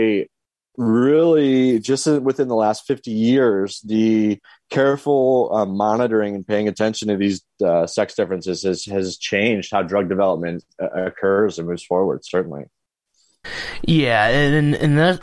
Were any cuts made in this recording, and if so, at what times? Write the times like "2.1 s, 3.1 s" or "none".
none